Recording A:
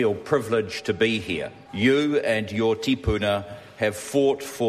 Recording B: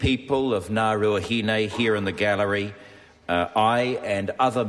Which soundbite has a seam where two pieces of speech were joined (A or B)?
A